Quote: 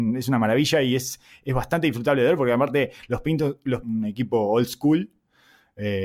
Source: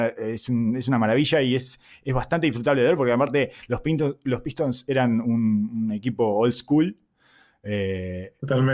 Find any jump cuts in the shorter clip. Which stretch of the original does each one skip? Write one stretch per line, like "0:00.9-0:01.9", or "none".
0:04.4-0:05.7